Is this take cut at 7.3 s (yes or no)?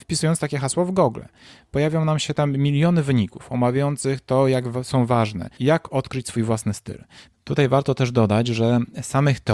yes